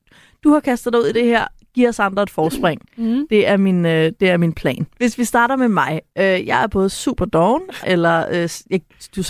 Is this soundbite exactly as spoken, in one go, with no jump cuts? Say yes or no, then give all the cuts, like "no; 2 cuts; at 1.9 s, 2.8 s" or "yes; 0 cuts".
no; 2 cuts; at 4.9 s, 7.8 s